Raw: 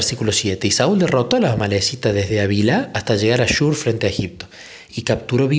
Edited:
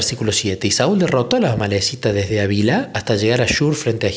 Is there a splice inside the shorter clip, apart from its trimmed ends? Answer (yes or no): no